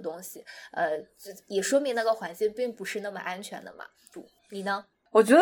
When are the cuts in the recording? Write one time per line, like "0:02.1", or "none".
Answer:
0:04.1